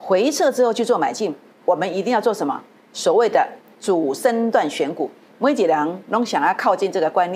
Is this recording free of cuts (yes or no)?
no